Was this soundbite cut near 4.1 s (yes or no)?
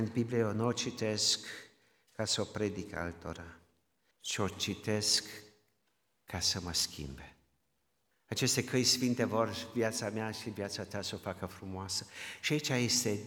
yes